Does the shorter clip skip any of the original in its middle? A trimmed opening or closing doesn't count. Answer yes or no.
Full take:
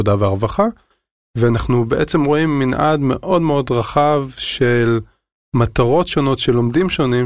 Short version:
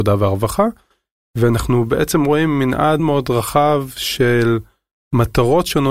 yes